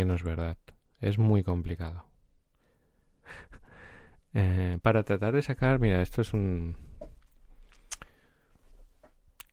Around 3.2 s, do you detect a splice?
yes; 2 cuts; at 3.2 s, 4.8 s

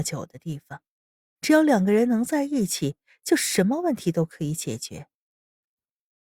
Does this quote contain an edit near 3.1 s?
no; 1 cut; at 1.4 s

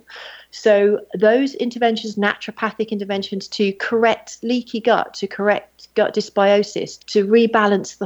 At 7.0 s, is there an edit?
yes; 1 cut; at 7.0 s

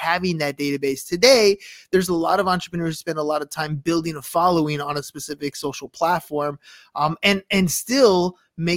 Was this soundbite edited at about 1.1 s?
no; 0 cuts

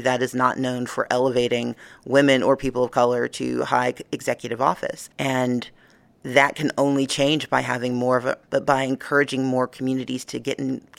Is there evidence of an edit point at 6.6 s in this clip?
no; 2 cuts; at 5.1 s, 8.4 s

